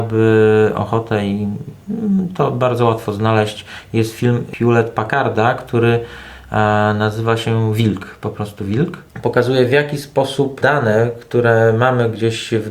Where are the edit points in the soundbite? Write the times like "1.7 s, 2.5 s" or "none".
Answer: none